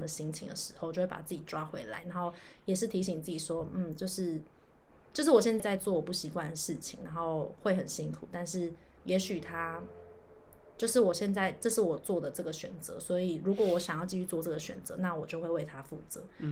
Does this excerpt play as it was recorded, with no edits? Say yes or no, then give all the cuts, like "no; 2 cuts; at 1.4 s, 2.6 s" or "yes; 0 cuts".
no; 1 cut; at 5.6 s